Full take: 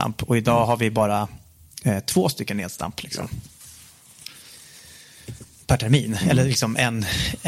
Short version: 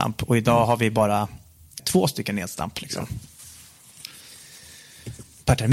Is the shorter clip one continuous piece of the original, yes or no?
no